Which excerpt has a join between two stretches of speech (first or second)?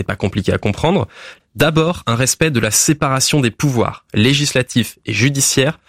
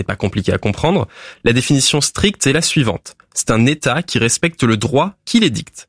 first